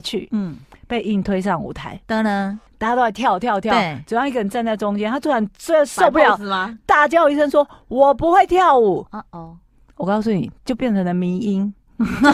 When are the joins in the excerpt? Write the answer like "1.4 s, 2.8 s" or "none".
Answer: 2.7 s

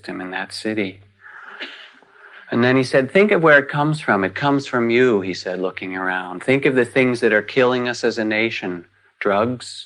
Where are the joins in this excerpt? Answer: none

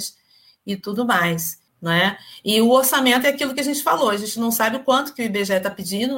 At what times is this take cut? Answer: 1.7 s

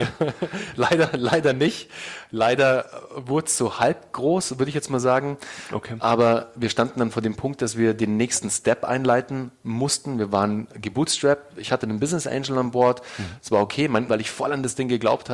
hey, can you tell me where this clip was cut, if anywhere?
14.1 s

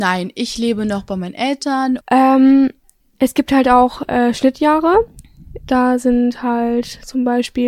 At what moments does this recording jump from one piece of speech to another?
2.0 s

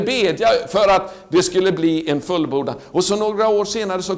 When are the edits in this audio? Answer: none

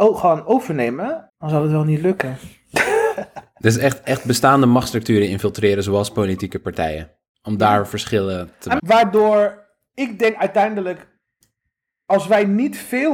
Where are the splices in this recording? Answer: 1.3 s, 8.8 s

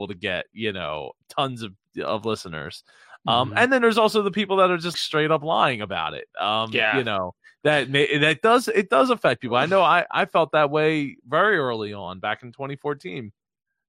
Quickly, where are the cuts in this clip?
4.9 s

